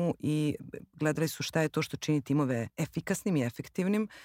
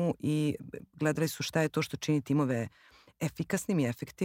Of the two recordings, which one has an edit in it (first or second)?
first